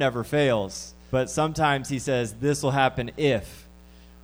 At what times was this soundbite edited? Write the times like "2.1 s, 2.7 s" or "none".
1.1 s